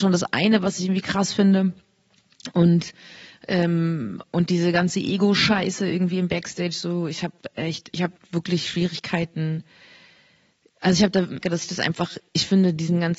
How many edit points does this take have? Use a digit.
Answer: 1